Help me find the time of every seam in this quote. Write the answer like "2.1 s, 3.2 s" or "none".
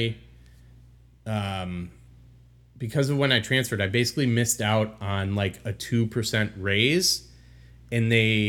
none